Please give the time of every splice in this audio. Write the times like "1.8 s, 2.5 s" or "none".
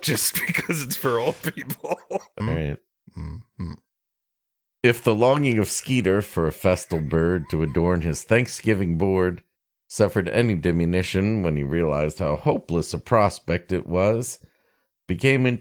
2.4 s